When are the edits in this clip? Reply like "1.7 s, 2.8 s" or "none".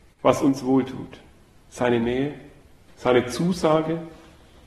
none